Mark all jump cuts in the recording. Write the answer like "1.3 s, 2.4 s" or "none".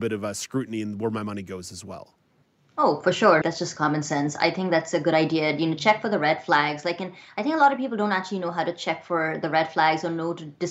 3.4 s